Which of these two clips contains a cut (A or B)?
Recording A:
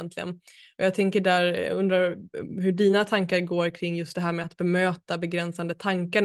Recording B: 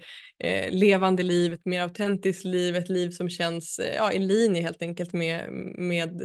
B